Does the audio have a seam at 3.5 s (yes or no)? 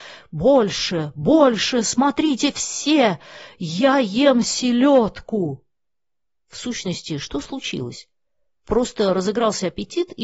no